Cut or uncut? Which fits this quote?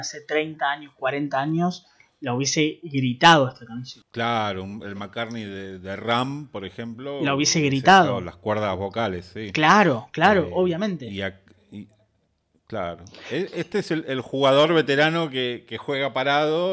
uncut